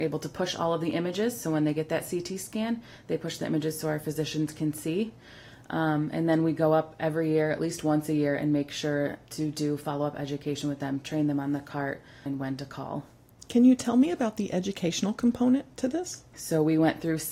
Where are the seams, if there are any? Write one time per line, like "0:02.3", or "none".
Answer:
0:12.3
0:16.3